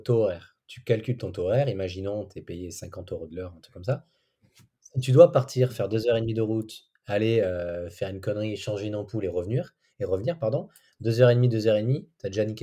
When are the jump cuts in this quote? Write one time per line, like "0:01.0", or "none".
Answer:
none